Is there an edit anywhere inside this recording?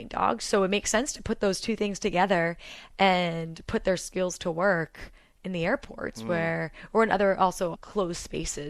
yes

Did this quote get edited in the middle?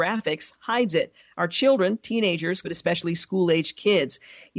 yes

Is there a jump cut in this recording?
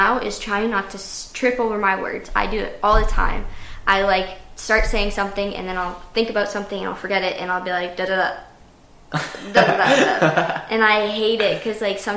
no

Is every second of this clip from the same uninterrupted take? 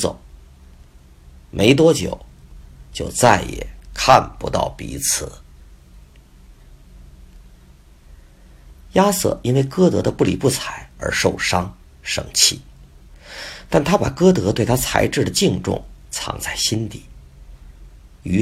yes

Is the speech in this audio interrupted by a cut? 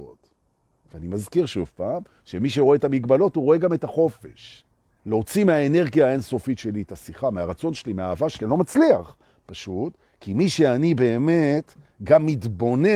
yes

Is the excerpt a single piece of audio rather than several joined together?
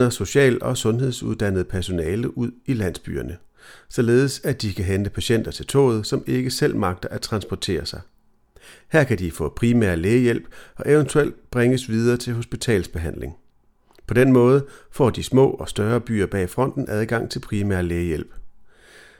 yes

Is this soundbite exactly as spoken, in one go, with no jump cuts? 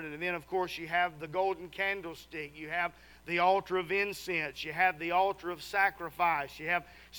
yes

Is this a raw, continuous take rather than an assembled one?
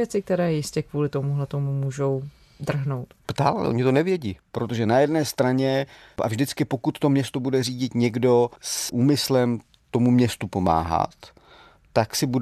no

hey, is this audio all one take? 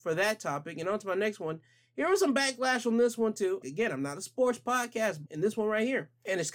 no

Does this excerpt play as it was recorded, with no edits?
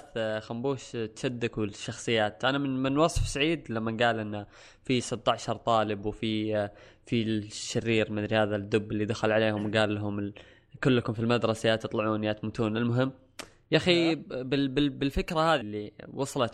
no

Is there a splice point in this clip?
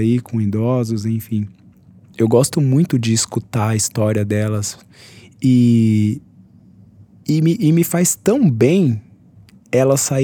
yes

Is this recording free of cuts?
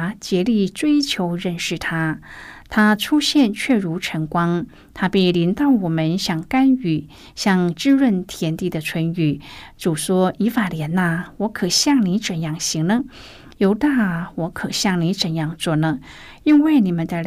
yes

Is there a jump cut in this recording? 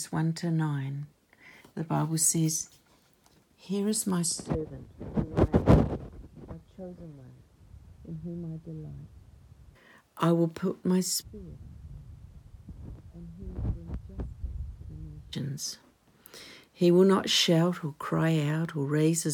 no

